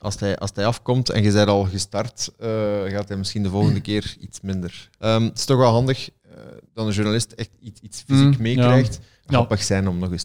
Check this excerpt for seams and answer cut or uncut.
cut